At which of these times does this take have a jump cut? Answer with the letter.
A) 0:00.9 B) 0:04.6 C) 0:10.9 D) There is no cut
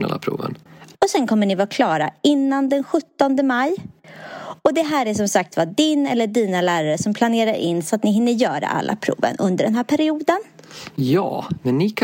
A